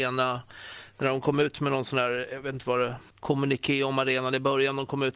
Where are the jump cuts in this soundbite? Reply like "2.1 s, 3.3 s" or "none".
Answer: 3.1 s